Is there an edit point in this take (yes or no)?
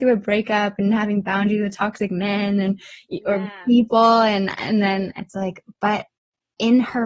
no